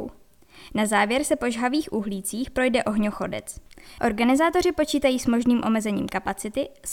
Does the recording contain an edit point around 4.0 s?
yes; 1 cut; at 4.0 s

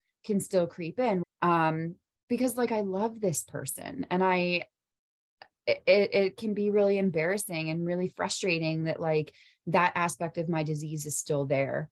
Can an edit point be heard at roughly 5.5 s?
no; 1 cut; at 1.2 s

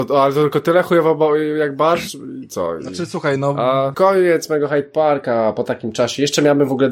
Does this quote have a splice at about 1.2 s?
no; 1 cut; at 3.9 s

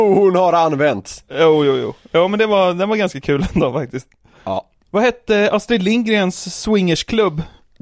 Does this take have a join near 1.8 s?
no; 0 cuts

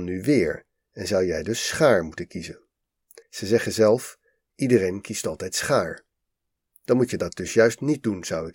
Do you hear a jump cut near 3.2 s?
yes; 1 cut; at 3.2 s

